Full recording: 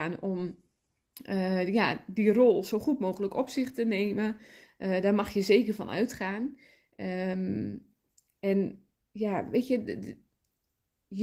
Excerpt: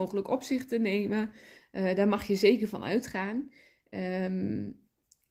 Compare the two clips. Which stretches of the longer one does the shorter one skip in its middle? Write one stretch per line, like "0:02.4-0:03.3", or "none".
none